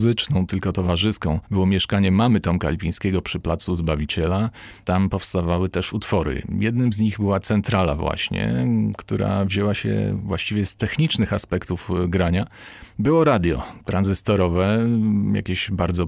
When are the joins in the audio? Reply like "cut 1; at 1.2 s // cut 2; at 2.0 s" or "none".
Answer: none